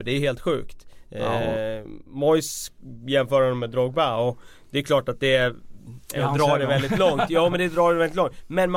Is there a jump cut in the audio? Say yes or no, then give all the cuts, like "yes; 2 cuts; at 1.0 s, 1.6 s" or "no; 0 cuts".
no; 0 cuts